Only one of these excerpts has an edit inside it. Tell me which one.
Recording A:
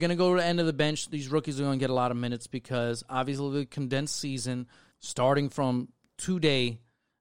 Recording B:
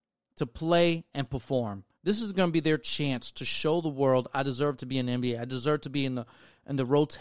A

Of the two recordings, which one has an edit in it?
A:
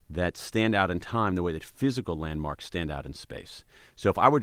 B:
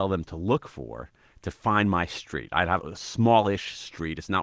B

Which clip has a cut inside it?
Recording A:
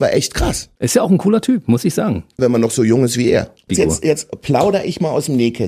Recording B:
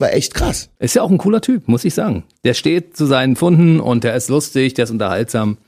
A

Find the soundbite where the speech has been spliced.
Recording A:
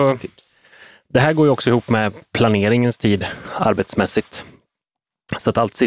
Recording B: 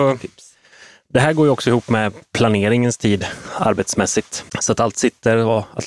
B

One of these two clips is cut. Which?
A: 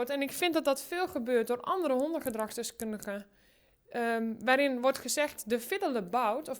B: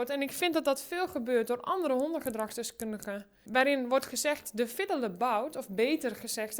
B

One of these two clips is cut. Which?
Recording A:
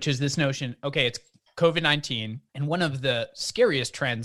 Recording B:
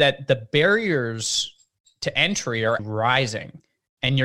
B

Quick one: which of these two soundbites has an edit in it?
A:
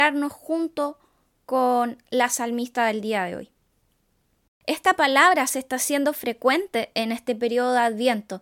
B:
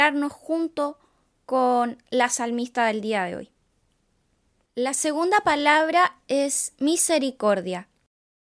A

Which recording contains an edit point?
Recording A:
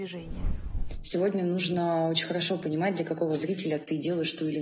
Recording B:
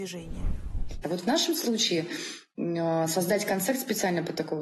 B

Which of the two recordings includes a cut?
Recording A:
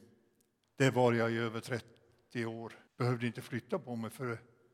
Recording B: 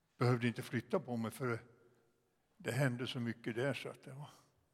A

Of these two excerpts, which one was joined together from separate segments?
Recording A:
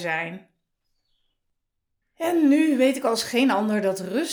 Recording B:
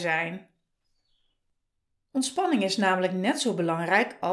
A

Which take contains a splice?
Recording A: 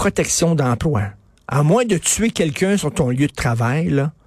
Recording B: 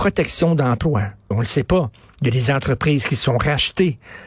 B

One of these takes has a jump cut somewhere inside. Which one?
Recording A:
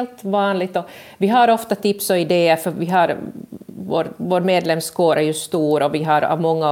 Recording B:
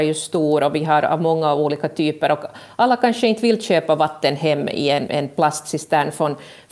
B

